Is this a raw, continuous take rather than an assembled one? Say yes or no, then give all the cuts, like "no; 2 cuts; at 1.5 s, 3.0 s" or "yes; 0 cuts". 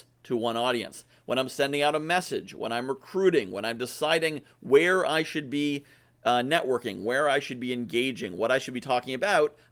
yes; 0 cuts